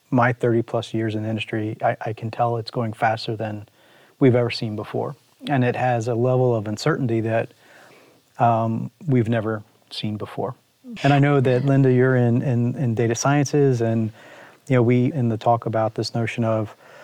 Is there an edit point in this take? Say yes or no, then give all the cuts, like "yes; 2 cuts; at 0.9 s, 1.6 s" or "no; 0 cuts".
yes; 2 cuts; at 11.0 s, 15.1 s